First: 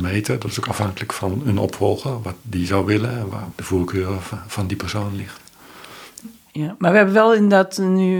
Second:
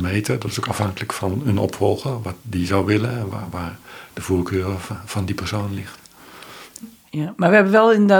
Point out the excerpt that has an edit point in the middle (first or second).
first